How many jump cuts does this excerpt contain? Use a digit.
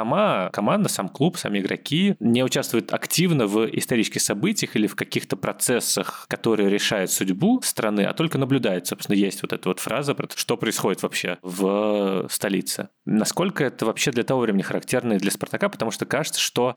1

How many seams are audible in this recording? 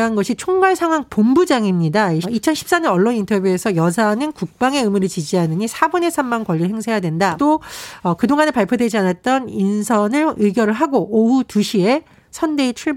2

